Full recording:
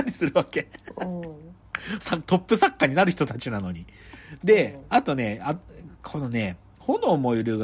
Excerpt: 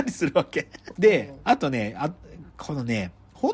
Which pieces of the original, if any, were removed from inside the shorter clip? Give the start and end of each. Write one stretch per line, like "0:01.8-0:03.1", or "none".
0:00.9-0:04.4

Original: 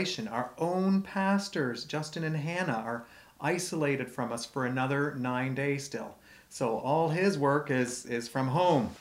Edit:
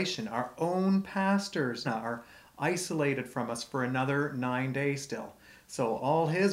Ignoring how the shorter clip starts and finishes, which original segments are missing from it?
0:01.8-0:02.7

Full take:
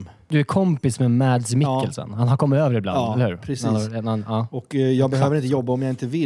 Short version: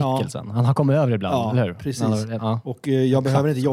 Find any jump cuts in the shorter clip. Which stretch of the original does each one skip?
0:04.0-0:04.3

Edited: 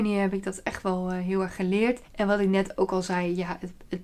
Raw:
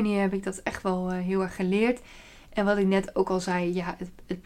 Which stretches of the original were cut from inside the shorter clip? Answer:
0:02.0-0:02.4

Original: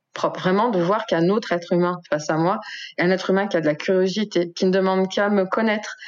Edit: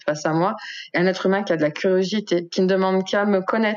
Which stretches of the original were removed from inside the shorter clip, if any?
none

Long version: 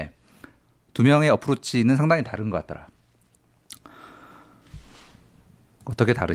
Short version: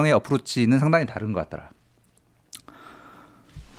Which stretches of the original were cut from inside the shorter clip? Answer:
none

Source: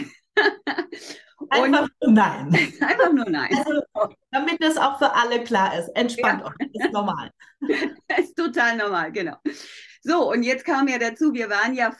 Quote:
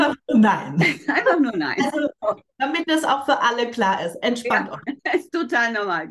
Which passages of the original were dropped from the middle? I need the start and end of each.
0:06.7-0:08.0

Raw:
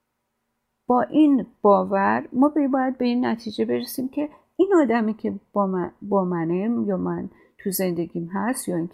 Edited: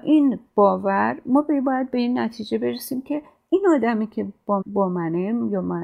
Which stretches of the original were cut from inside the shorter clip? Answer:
0:05.7-0:06.0

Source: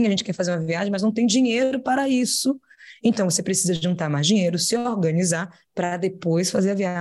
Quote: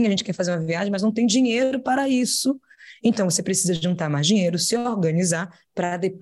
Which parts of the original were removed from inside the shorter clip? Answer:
none

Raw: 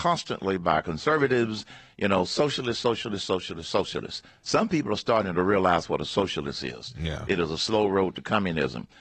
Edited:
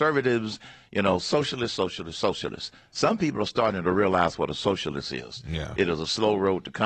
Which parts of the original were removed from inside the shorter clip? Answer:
0:02.8-0:03.3

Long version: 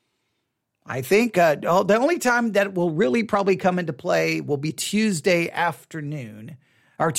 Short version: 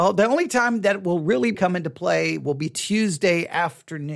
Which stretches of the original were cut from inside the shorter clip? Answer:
0:03.3-0:03.6

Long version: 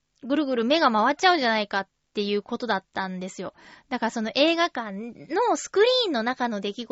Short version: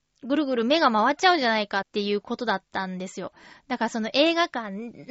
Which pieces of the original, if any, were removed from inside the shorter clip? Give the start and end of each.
0:01.8-0:02.0

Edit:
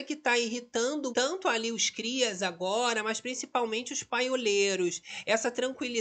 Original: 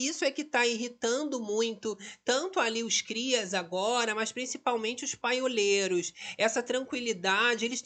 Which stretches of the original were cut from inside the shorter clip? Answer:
0:01.4-0:02.2

